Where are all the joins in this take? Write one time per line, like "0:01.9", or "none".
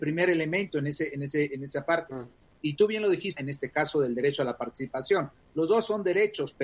0:03.4